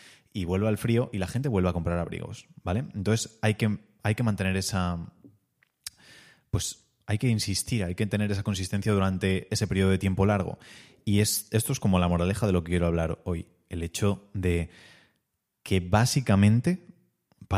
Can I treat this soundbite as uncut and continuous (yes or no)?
yes